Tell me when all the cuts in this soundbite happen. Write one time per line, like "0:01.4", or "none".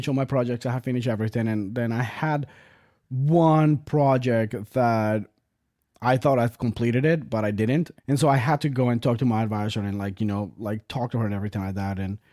0:08.0

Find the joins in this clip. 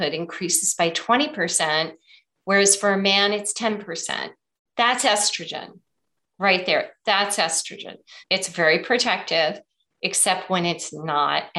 0:08.2

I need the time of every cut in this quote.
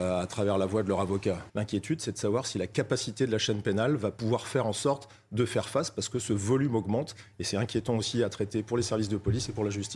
0:01.5

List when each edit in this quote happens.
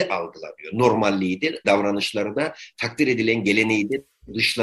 0:01.6

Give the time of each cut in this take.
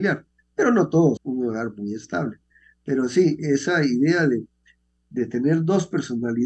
0:01.2

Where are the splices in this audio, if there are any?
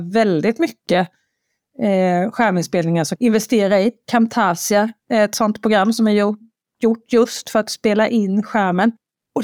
0:03.2

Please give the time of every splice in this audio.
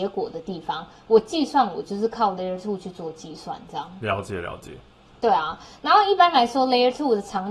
none

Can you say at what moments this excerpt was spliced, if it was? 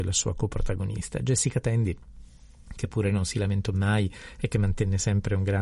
none

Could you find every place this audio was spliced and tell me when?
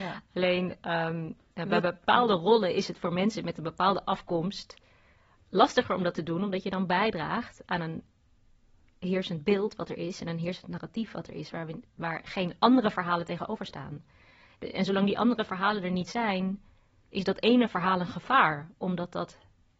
none

